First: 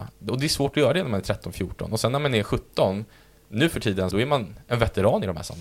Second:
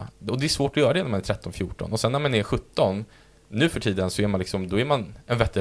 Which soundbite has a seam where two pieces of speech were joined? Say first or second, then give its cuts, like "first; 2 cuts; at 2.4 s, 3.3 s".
first; 1 cut; at 4.1 s